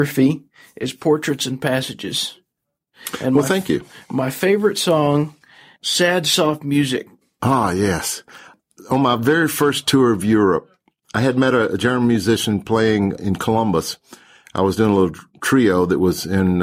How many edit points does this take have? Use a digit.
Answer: 1